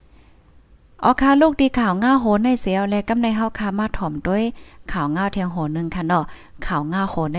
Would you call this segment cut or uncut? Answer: uncut